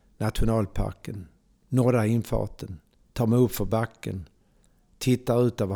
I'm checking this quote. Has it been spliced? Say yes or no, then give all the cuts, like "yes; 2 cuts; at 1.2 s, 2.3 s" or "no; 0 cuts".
no; 0 cuts